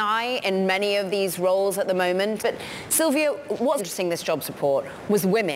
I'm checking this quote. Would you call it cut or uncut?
cut